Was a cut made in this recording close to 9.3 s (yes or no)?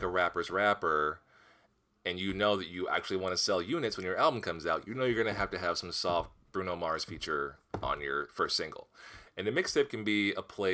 yes